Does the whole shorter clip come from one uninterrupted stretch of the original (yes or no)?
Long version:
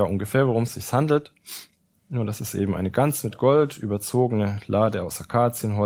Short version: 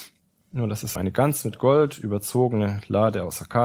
no